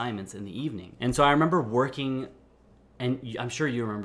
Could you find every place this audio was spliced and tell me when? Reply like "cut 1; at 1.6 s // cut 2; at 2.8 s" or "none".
cut 1; at 1.0 s